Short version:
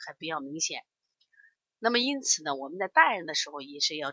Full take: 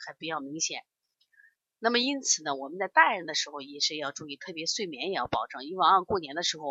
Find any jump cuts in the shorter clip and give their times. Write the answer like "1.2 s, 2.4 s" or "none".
none